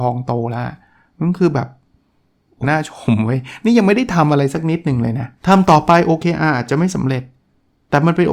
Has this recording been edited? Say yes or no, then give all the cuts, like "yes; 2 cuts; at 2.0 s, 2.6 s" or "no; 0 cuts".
yes; 2 cuts; at 2.6 s, 5.4 s